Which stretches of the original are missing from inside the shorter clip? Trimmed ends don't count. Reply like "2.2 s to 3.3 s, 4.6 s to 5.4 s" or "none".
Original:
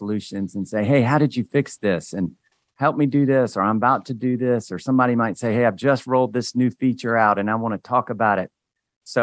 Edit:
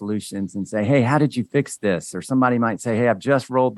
2.1 s to 4.7 s